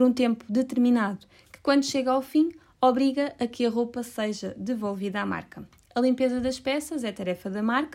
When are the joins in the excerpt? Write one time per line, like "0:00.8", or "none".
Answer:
none